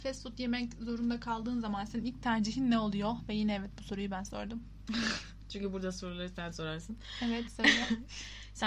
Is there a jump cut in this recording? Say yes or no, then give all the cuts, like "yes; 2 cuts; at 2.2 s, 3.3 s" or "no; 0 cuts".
no; 0 cuts